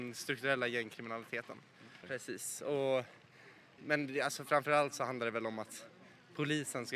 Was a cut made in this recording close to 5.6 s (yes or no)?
no